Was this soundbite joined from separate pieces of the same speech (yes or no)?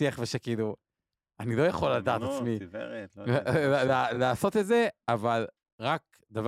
no